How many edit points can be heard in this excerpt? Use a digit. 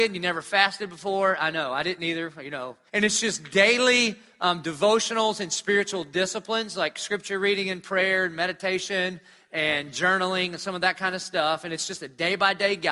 1